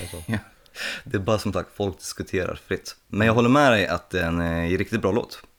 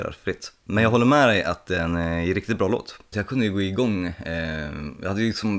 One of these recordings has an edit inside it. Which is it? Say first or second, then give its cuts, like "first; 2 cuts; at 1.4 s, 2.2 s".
second; 1 cut; at 3.1 s